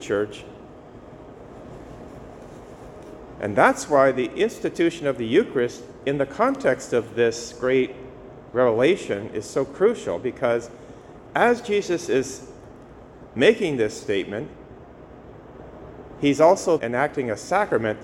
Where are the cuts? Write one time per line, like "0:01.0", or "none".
0:03.3
0:16.8